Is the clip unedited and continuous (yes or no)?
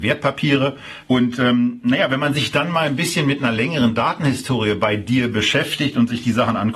no